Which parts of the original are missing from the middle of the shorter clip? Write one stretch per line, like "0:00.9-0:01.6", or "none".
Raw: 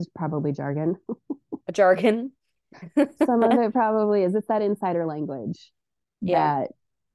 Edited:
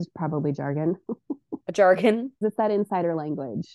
0:02.4-0:04.3